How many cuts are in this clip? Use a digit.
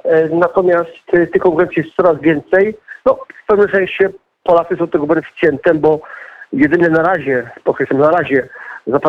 1